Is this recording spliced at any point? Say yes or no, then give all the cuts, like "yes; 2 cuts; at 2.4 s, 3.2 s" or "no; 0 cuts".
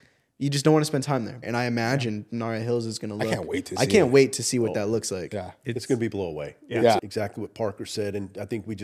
yes; 2 cuts; at 1.4 s, 7.0 s